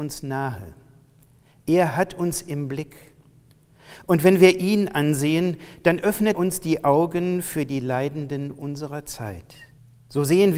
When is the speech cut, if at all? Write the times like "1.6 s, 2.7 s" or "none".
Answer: 6.3 s